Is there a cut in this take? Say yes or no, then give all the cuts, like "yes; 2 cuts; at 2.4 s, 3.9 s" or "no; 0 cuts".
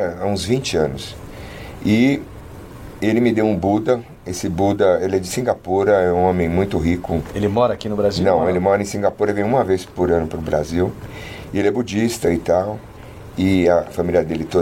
no; 0 cuts